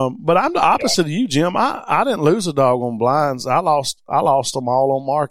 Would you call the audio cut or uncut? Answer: uncut